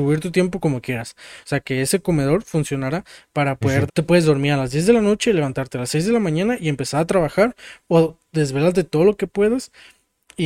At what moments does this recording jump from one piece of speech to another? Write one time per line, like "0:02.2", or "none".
0:01.4
0:03.9

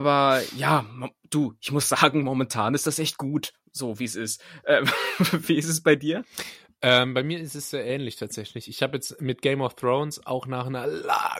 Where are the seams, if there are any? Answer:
none

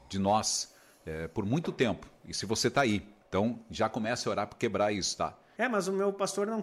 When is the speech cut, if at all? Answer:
0:03.2
0:05.6

